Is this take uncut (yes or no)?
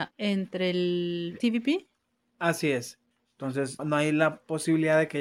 no